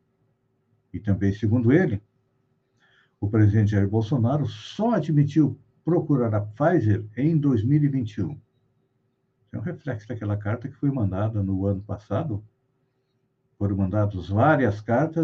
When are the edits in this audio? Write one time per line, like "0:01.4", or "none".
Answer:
none